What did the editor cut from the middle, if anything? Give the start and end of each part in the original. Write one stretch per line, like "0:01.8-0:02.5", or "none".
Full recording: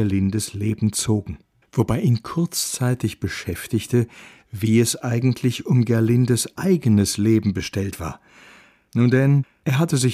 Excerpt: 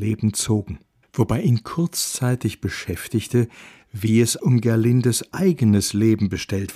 0:05.0-0:05.6